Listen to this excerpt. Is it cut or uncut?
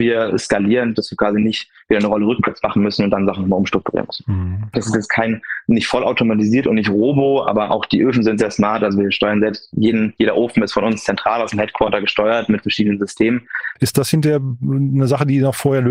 cut